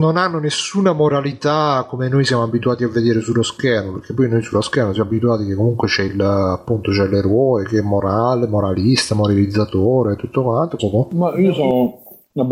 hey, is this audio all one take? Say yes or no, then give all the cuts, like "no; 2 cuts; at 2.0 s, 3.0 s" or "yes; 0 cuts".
no; 1 cut; at 10.8 s